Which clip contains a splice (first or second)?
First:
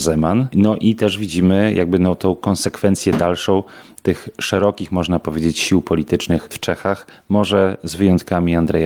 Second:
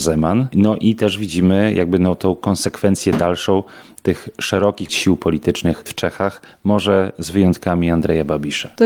second